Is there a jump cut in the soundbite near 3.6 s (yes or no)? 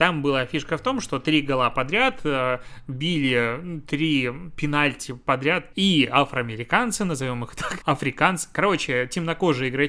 no